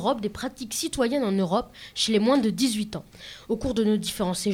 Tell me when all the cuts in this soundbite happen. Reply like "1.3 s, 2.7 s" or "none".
none